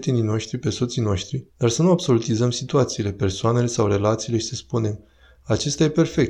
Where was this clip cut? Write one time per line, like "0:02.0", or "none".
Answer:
0:01.5

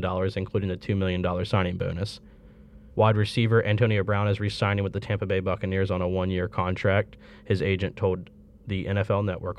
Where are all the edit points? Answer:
0:02.9

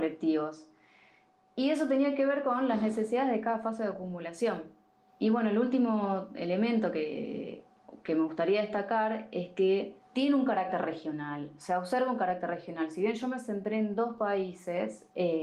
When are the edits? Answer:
none

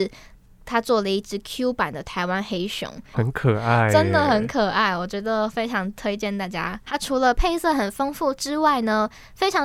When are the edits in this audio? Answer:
0:03.1
0:06.9

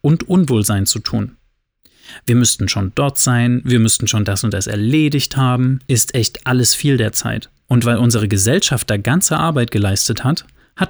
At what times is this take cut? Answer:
0:05.8
0:07.6

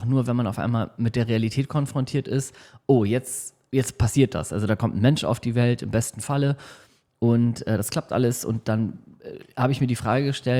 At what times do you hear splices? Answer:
none

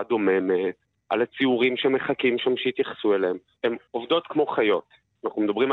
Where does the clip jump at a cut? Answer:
0:03.6

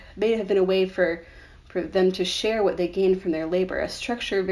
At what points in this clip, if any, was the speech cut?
none

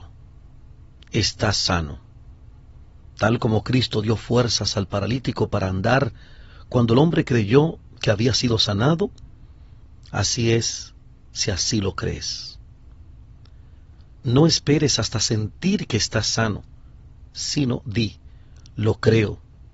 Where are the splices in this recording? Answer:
none

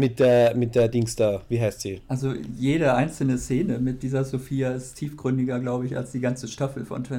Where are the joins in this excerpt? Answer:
none

